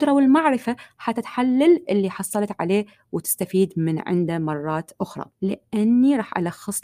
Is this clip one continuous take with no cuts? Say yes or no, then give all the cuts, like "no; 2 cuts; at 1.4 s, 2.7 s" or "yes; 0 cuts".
no; 1 cut; at 5.3 s